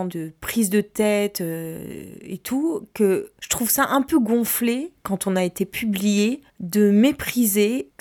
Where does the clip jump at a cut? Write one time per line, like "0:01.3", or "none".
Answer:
0:06.5